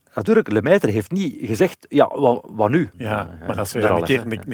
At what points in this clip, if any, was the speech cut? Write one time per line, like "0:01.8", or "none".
0:02.9